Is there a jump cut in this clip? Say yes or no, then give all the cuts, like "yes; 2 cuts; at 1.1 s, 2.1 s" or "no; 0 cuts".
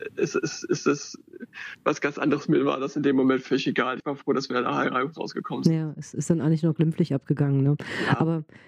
no; 0 cuts